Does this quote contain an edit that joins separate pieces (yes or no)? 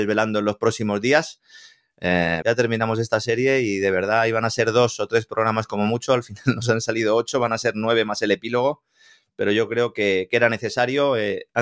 yes